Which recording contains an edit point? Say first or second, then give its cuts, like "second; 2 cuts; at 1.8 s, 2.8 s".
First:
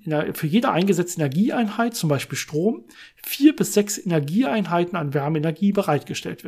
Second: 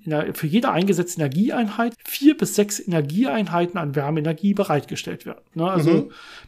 second; 2 cuts; at 1.9 s, 5.5 s